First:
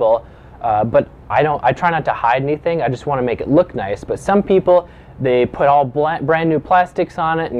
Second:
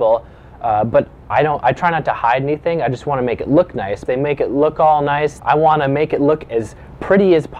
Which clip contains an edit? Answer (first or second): second